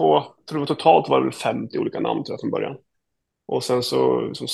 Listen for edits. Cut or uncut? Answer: uncut